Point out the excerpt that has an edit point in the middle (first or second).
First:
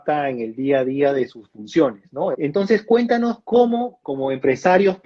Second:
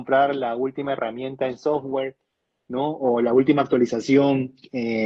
first